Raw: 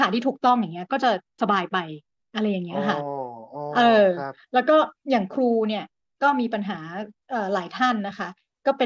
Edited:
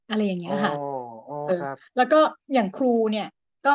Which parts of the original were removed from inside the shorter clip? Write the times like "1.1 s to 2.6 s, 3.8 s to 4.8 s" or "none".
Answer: 3.7 s to 4.1 s